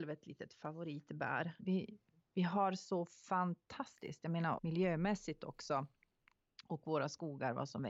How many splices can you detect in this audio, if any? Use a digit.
2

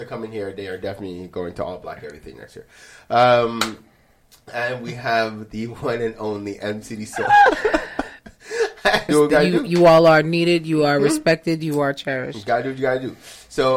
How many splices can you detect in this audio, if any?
1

